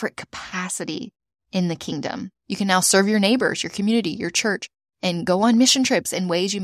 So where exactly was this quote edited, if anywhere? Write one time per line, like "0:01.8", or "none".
0:02.3